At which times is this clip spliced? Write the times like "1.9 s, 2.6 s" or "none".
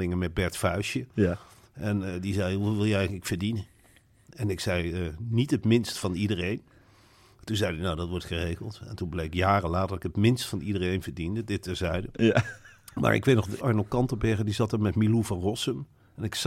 13.6 s